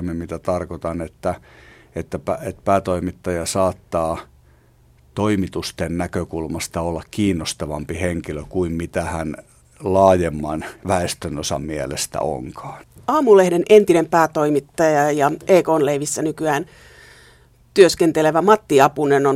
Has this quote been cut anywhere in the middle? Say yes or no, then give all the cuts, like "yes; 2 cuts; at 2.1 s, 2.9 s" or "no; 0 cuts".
no; 0 cuts